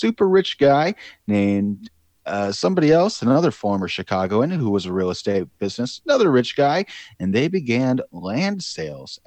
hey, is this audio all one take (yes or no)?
yes